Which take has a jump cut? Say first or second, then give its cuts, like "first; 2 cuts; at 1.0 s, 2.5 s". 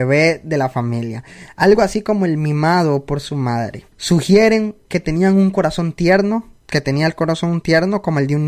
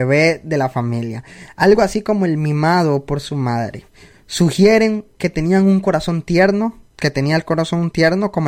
first; 1 cut; at 3.9 s